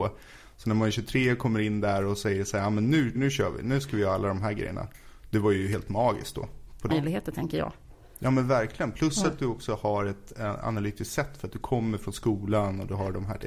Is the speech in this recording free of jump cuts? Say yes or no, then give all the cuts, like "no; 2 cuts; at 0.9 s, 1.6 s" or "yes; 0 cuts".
no; 2 cuts; at 3.1 s, 6.9 s